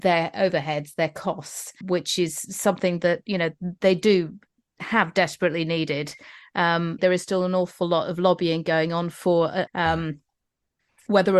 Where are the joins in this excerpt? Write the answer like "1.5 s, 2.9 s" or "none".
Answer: 1.8 s, 7.0 s, 9.7 s